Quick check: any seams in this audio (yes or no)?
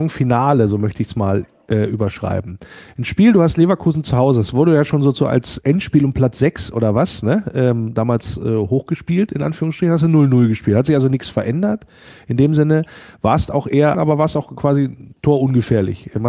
yes